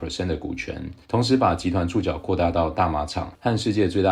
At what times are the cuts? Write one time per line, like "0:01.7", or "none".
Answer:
0:01.0